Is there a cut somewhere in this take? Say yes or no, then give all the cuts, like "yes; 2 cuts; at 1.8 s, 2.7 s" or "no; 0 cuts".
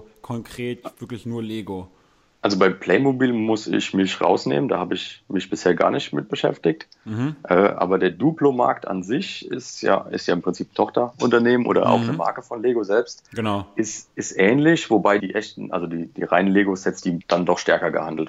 yes; 2 cuts; at 15.2 s, 17.2 s